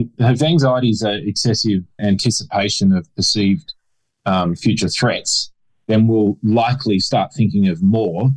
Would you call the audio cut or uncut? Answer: cut